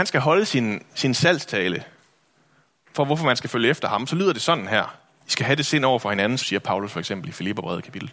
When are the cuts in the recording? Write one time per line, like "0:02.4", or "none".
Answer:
0:05.2
0:06.4